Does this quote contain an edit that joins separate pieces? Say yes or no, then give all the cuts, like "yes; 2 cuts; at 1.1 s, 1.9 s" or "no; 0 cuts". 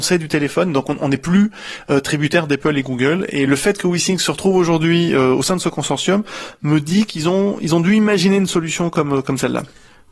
no; 0 cuts